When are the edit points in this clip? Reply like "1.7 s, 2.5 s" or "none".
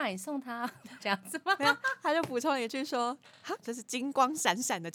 1.0 s, 3.6 s